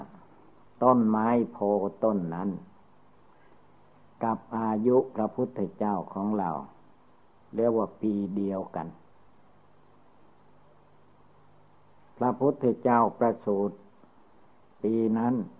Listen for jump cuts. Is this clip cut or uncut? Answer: uncut